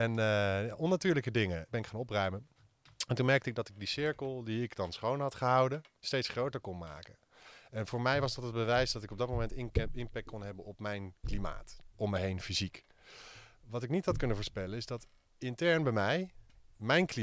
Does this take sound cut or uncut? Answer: cut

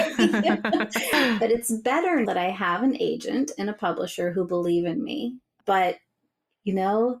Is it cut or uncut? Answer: cut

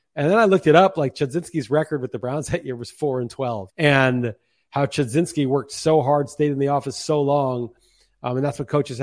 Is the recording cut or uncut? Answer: cut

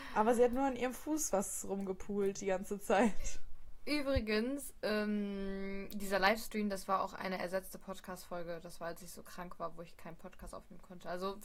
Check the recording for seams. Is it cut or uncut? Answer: uncut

